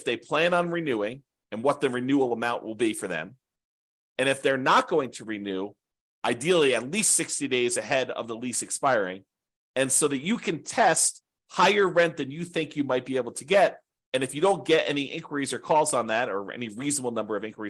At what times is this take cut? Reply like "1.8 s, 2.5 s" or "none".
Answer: 6.1 s